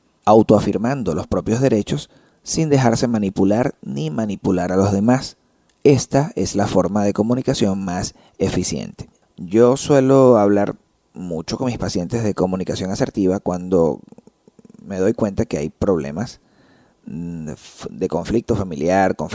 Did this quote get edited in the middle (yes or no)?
no